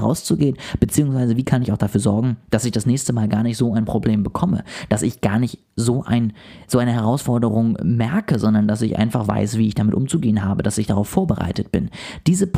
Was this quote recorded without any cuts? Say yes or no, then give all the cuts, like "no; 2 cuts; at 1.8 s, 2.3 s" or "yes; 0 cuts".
yes; 0 cuts